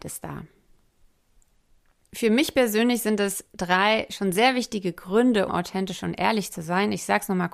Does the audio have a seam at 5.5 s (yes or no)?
yes